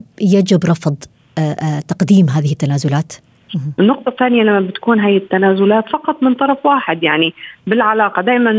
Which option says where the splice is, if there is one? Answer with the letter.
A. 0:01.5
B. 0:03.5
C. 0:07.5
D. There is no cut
B